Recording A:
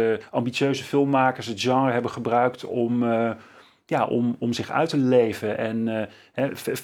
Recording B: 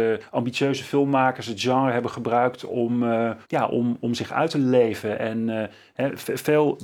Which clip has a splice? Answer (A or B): B